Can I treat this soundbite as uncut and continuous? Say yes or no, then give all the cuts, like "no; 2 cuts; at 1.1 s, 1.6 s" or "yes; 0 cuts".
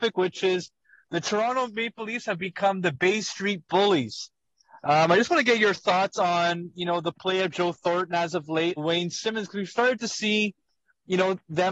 no; 1 cut; at 8.8 s